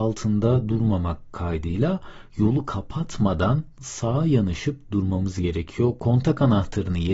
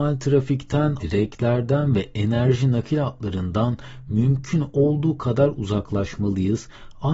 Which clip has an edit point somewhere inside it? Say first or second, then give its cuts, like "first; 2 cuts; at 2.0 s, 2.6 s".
second; 1 cut; at 1.0 s